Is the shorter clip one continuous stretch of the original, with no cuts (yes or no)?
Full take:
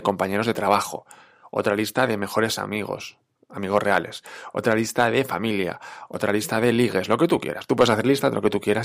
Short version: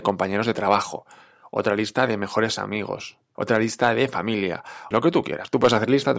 no